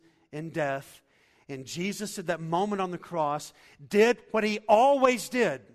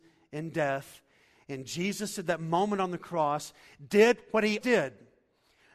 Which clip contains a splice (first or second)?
second